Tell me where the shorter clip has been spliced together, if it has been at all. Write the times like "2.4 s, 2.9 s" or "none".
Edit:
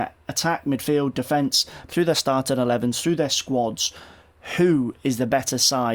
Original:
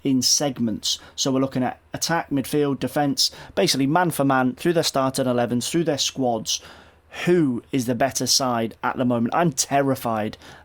1.9 s